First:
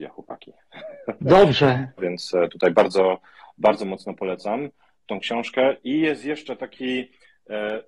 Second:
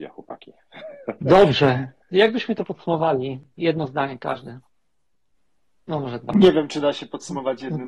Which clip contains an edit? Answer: first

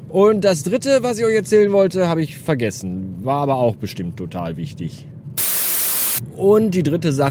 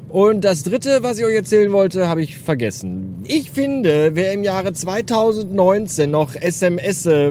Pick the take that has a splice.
second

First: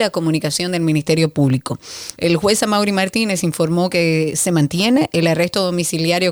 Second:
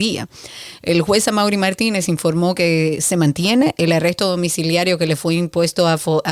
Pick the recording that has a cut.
first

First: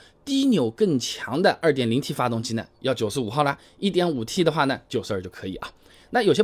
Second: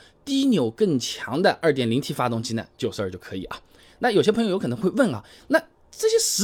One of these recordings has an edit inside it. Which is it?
second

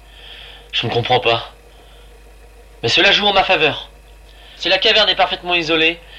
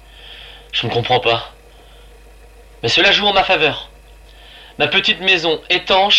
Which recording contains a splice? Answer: first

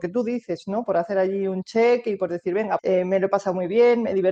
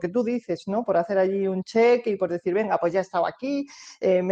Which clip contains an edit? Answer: first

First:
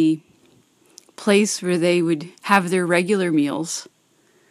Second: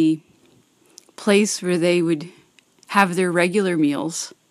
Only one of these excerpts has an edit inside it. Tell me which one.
first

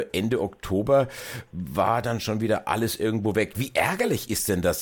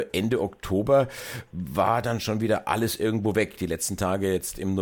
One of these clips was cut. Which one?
first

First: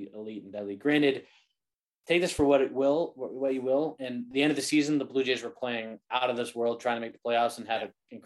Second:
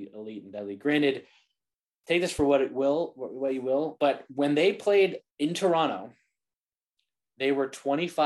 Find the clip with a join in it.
second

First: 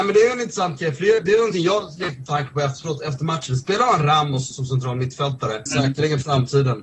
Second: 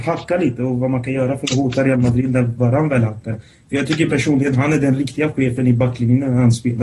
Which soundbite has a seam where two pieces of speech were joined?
first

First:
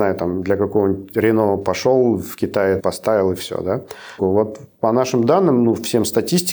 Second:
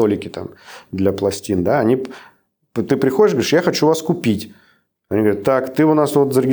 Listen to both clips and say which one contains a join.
first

